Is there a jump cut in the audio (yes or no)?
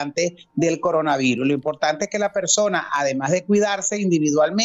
no